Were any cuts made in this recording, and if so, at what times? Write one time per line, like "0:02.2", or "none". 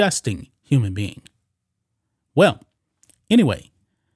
0:02.2